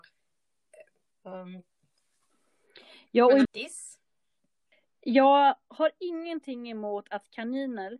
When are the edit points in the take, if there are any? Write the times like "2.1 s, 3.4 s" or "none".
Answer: 1.1 s, 3.5 s